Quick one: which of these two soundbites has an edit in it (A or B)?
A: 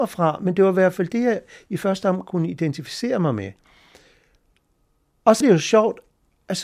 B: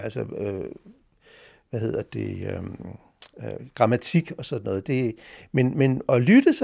A